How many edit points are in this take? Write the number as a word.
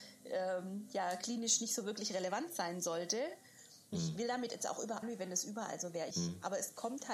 three